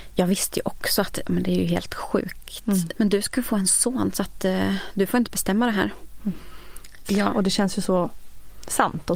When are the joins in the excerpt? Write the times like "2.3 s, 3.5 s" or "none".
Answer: 2.9 s, 7.0 s